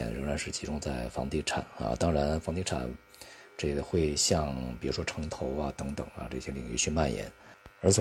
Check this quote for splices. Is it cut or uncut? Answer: uncut